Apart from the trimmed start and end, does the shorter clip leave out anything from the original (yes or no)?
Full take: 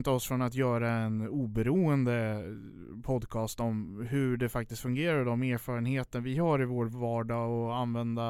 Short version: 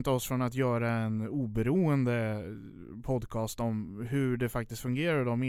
no